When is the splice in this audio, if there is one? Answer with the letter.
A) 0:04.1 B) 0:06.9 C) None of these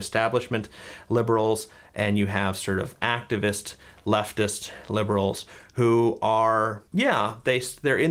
B